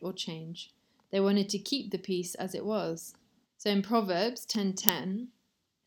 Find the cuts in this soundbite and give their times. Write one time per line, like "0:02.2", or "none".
0:03.5